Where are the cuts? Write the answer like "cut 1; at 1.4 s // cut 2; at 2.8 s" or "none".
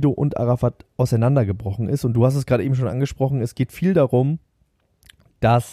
none